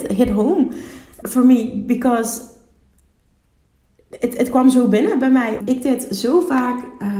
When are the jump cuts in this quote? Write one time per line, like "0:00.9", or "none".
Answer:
0:01.2
0:05.6